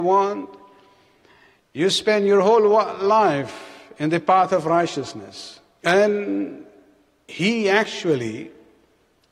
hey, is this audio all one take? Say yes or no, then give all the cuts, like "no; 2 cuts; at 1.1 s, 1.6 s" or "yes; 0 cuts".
no; 1 cut; at 5.8 s